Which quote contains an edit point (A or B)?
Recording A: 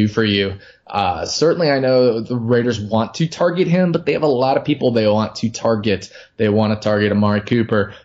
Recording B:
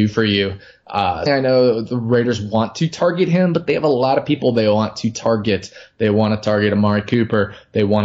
B